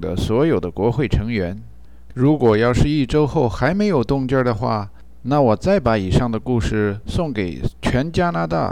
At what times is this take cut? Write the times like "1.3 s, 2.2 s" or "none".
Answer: 2.1 s